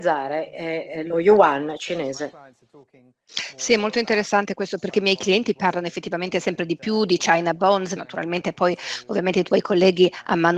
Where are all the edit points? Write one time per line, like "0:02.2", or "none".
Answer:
0:08.0